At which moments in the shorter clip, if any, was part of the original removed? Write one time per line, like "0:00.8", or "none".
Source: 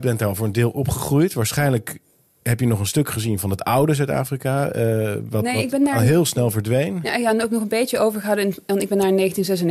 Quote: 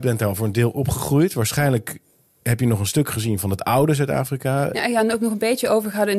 0:04.7